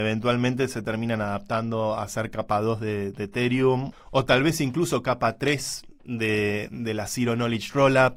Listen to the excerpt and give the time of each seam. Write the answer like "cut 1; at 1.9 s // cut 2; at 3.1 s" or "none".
cut 1; at 3.9 s // cut 2; at 6.7 s